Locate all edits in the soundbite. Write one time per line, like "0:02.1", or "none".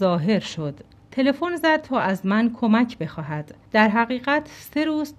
0:01.0
0:03.7